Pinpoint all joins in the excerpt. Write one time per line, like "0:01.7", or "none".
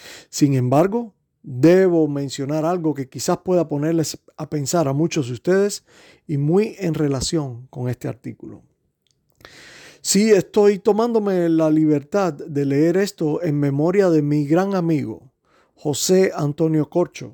none